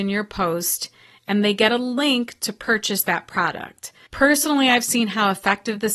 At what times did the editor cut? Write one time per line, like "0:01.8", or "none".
0:04.1